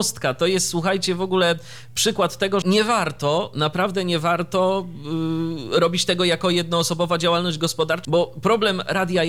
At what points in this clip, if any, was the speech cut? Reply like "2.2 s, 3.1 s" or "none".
2.6 s, 8.0 s